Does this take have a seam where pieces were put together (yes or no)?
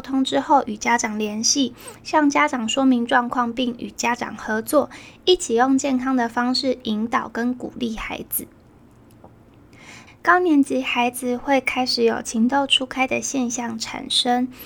yes